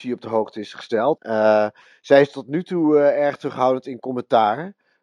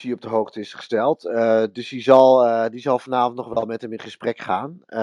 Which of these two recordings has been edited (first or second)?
first